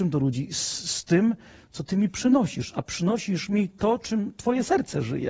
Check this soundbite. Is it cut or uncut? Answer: uncut